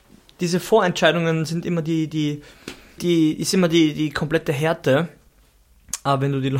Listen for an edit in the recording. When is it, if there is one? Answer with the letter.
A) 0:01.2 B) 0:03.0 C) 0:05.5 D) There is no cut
B